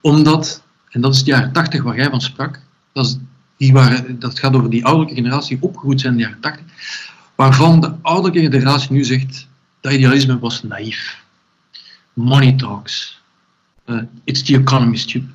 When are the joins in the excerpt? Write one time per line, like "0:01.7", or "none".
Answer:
none